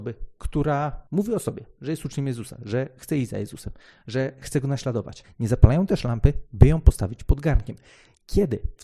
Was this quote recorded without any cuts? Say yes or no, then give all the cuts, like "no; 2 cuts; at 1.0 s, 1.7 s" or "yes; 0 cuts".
no; 1 cut; at 5.2 s